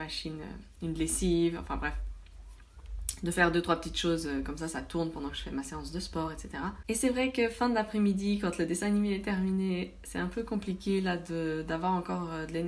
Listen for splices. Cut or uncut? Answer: uncut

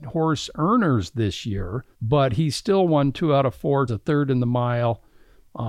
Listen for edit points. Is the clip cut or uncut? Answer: cut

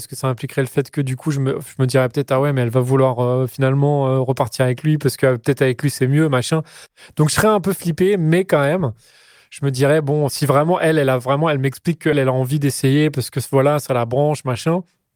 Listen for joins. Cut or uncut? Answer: cut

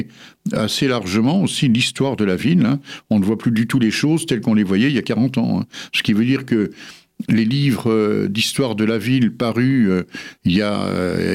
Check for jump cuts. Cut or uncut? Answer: uncut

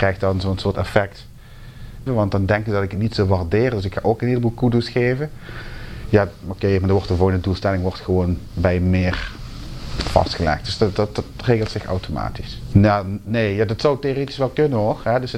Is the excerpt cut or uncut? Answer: cut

